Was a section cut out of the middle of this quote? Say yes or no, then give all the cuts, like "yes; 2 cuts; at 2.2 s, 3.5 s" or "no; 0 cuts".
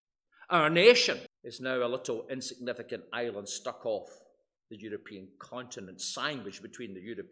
yes; 1 cut; at 1.3 s